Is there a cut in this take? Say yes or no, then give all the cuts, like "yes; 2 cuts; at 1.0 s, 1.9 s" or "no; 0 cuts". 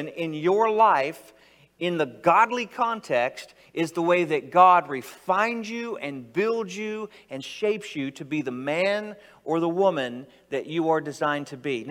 no; 0 cuts